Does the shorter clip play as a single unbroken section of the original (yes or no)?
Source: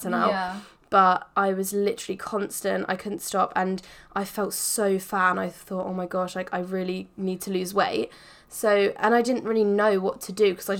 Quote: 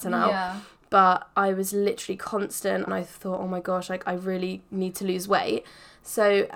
no